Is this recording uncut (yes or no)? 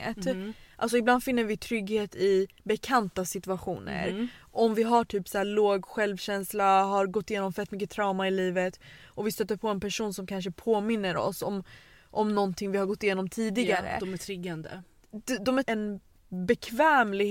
no